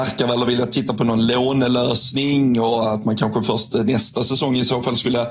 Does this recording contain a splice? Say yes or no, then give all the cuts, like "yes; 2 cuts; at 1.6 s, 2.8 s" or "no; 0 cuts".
no; 0 cuts